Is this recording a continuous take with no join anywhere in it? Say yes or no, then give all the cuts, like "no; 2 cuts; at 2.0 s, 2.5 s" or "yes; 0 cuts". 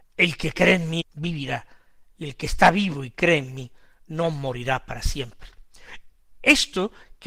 no; 1 cut; at 1.0 s